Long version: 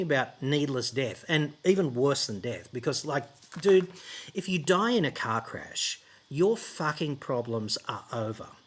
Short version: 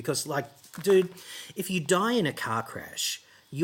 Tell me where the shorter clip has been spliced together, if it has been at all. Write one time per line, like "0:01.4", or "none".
none